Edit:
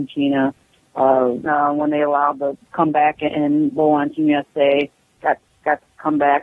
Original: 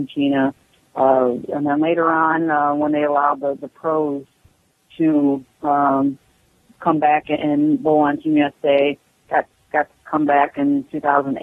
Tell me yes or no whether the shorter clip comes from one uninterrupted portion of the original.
no